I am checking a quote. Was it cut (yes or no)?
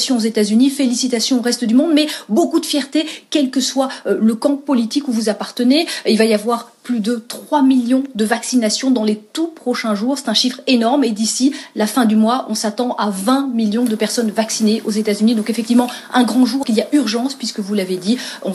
yes